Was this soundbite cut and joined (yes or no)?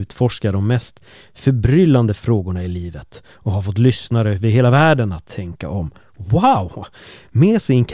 no